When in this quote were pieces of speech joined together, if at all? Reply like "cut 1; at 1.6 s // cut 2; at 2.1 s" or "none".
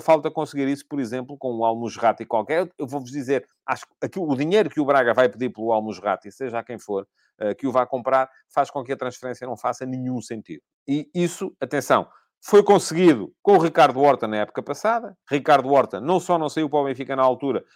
cut 1; at 10.7 s // cut 2; at 13.4 s // cut 3; at 15.2 s